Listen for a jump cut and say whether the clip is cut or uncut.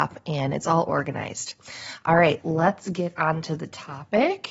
cut